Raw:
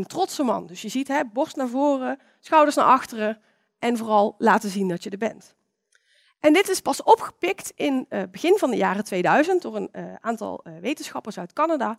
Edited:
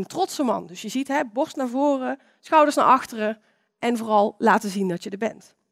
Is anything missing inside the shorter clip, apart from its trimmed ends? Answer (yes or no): no